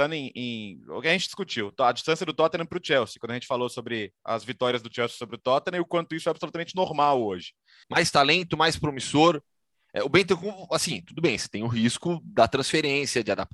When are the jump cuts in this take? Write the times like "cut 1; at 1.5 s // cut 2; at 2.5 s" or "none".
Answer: cut 1; at 7.8 s